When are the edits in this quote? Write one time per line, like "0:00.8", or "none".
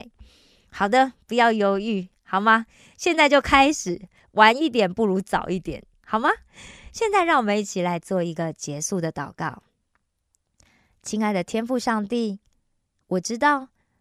0:06.0